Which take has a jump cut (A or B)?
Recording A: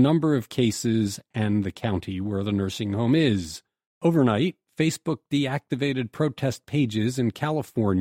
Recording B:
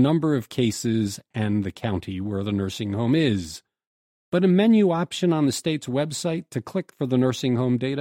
A